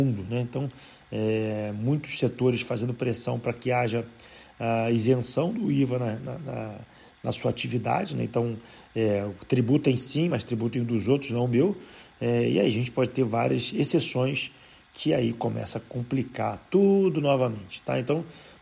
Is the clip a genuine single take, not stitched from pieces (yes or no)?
yes